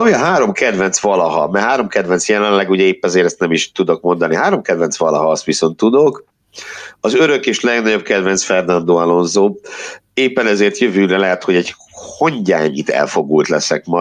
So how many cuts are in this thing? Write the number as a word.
zero